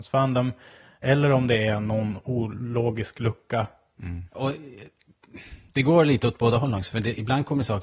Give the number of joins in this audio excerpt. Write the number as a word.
one